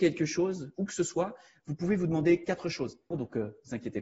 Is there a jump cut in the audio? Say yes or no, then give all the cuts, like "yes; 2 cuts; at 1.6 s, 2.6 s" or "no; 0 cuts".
yes; 1 cut; at 3.1 s